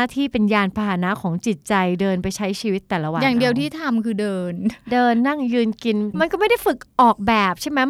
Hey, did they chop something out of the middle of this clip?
no; 0 cuts

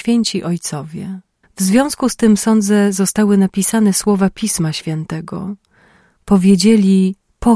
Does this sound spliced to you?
yes; 1 cut; at 1.4 s

